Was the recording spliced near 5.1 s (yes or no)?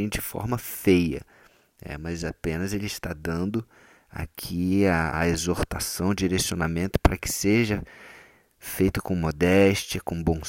yes